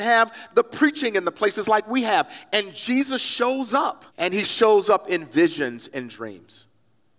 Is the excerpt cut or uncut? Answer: cut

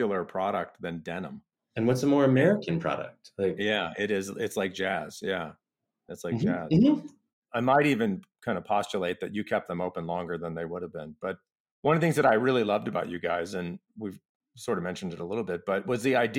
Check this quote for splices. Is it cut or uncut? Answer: uncut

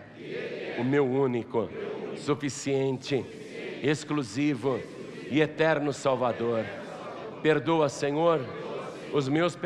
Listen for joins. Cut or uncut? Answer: uncut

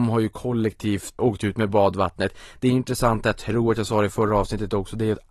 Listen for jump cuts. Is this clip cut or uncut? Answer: cut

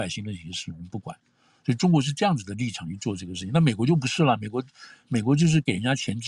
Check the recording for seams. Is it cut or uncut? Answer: uncut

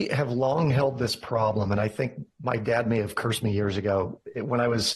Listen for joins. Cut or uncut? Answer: uncut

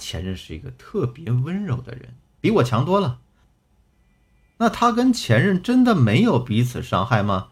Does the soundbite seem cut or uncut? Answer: cut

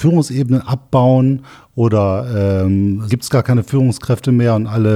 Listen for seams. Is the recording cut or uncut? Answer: cut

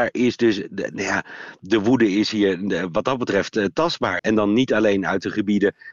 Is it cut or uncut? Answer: cut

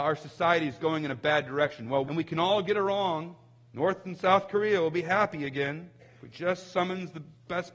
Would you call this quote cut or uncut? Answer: cut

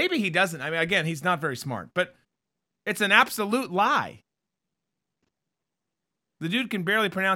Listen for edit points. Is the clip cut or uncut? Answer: uncut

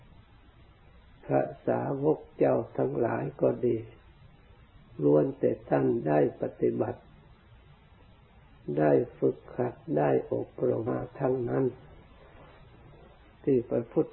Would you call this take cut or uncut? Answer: cut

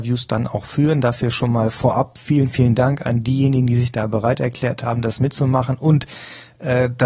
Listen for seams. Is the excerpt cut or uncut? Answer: uncut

